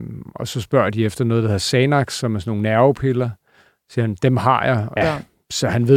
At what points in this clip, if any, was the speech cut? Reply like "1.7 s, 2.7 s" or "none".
5.0 s